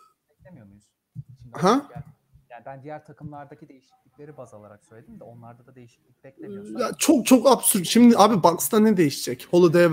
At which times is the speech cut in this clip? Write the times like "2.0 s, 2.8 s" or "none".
none